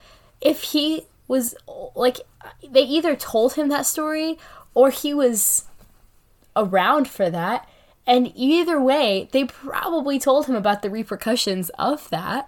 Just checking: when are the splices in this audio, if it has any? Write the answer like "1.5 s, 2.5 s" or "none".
none